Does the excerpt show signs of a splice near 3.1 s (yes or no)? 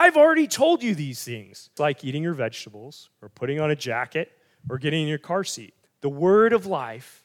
no